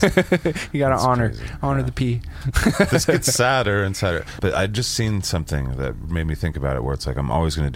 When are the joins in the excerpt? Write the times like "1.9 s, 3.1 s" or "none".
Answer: 4.4 s